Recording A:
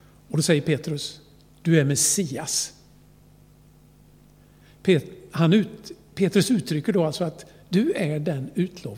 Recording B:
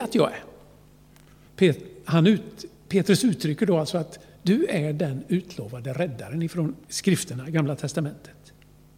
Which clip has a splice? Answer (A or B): B